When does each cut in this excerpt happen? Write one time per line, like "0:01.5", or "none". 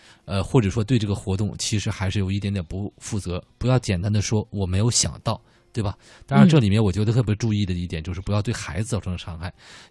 none